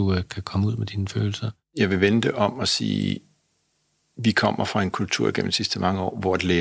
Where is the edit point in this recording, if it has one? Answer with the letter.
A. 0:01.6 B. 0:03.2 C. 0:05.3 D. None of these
D